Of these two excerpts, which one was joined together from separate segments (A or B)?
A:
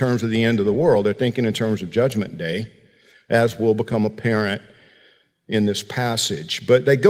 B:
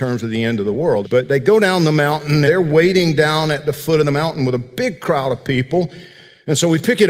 B